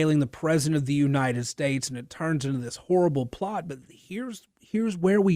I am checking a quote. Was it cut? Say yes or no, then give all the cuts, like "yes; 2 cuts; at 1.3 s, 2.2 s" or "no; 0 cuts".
no; 0 cuts